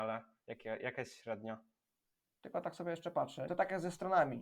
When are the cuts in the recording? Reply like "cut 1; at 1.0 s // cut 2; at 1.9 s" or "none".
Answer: cut 1; at 2.3 s // cut 2; at 3.5 s